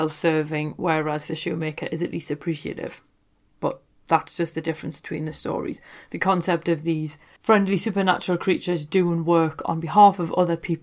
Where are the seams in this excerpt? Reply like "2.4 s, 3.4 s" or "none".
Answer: 3.5 s